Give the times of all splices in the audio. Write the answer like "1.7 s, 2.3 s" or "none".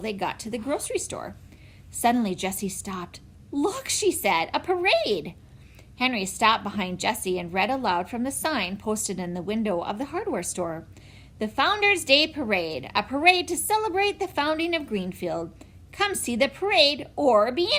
none